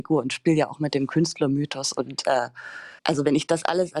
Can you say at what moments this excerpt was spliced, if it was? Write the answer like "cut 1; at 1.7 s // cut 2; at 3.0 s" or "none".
cut 1; at 3.0 s